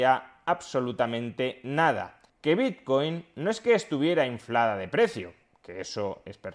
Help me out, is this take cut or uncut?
uncut